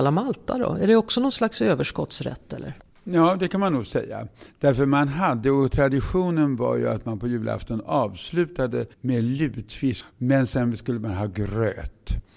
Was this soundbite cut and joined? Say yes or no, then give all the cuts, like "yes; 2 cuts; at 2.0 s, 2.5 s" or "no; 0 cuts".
yes; 1 cut; at 8.9 s